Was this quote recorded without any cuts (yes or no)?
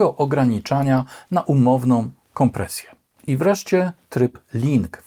no